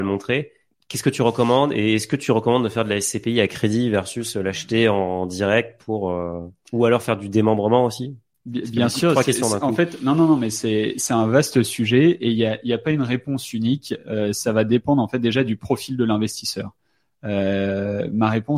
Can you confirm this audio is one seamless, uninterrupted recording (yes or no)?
yes